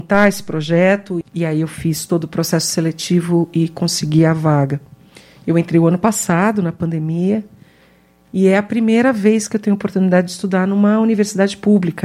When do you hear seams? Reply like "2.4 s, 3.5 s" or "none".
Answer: 1.2 s